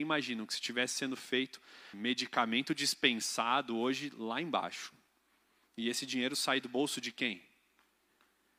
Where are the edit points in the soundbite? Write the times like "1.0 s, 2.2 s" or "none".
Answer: 1.9 s